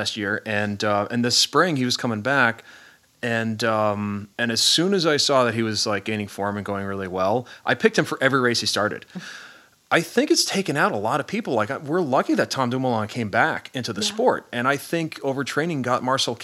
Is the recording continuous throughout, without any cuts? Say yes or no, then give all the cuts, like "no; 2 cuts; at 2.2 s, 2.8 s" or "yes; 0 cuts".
no; 2 cuts; at 4.3 s, 9.1 s